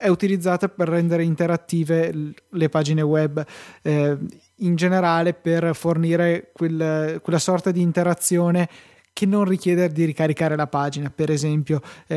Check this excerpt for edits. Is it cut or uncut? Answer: uncut